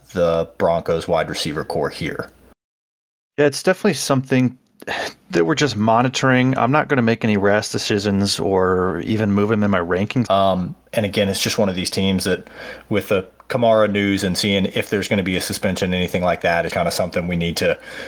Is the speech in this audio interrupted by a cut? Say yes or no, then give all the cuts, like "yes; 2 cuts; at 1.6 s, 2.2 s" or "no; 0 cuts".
yes; 2 cuts; at 10.3 s, 16.7 s